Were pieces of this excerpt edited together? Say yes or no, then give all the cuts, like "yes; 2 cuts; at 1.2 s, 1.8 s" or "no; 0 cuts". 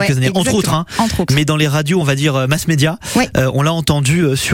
no; 0 cuts